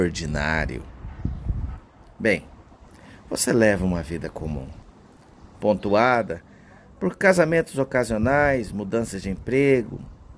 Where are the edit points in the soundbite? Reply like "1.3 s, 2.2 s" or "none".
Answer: none

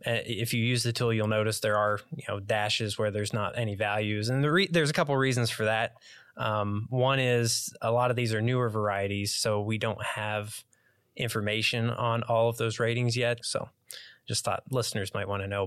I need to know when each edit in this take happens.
13.4 s

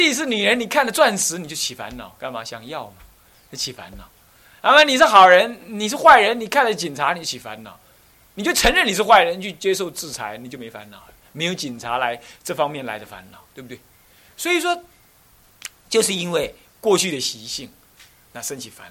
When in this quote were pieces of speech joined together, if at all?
none

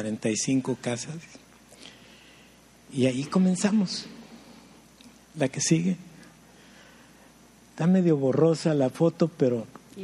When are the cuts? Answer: none

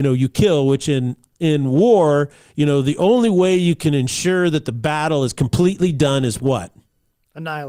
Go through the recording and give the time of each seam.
none

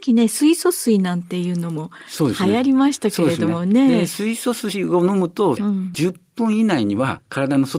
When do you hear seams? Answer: 5.6 s

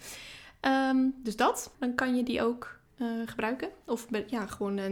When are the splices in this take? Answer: 1.7 s, 2.9 s

